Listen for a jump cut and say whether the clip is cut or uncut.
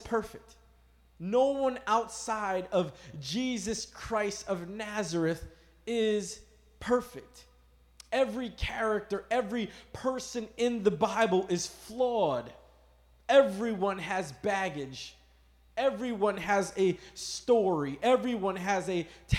uncut